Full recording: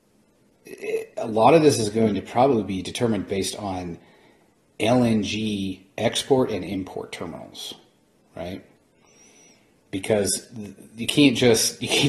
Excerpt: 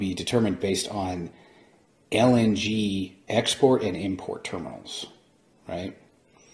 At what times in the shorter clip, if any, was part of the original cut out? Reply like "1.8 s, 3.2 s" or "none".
none